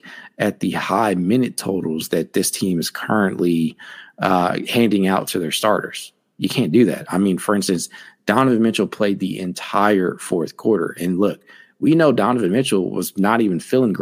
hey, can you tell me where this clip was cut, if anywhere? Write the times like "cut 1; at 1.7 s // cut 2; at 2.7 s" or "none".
none

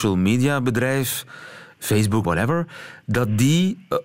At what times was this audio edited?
cut 1; at 2.2 s

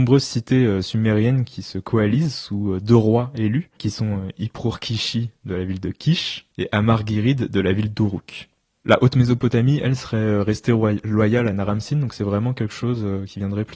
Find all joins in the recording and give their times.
cut 1; at 6.5 s

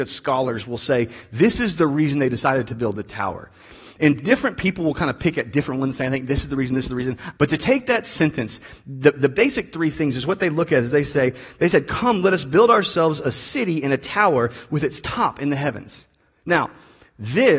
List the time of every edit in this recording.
cut 1; at 7.4 s

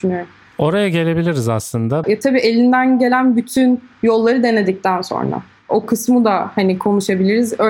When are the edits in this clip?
cut 1; at 2.0 s

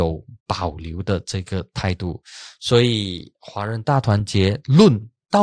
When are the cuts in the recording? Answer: none

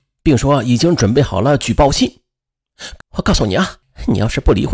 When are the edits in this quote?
cut 1; at 3.0 s

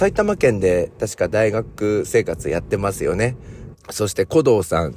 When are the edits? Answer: cut 1; at 3.7 s

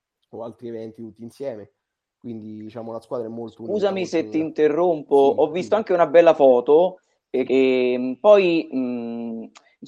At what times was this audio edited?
cut 1; at 7.5 s

